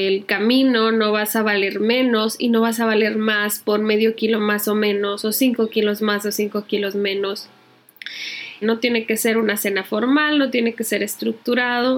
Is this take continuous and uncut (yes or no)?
no